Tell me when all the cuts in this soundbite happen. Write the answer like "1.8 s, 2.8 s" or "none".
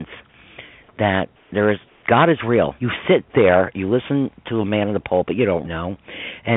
2.8 s, 5.6 s